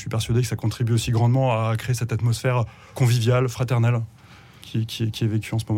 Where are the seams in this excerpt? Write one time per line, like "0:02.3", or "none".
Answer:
0:02.9